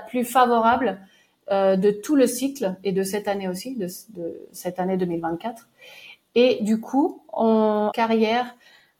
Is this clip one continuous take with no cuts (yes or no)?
no